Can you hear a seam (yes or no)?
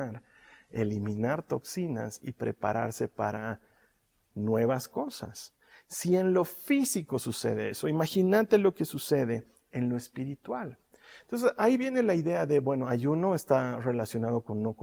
no